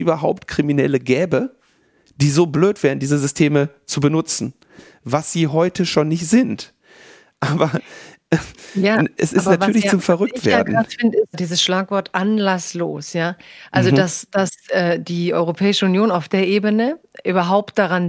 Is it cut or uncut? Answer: uncut